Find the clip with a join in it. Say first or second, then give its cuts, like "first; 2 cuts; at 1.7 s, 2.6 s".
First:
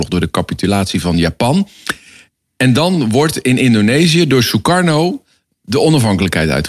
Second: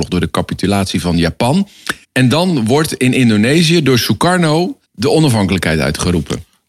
second; 2 cuts; at 2.0 s, 4.8 s